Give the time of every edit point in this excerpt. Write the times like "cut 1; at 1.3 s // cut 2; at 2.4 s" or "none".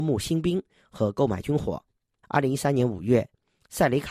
cut 1; at 2.2 s